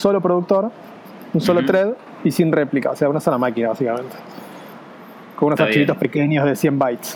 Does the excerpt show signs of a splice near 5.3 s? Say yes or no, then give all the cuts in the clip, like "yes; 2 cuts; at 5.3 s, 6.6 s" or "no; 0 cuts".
no; 0 cuts